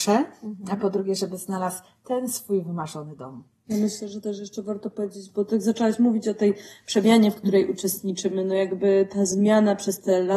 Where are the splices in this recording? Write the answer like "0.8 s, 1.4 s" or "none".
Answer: none